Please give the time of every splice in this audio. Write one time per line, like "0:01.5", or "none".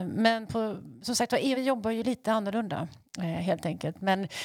0:01.5